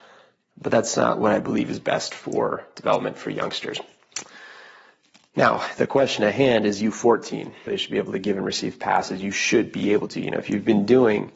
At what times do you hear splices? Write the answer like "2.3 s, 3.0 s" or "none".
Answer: 7.7 s